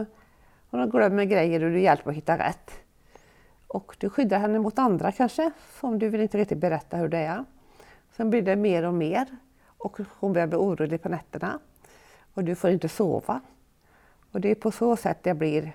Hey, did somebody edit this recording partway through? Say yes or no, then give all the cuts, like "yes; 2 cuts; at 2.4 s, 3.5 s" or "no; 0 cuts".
no; 0 cuts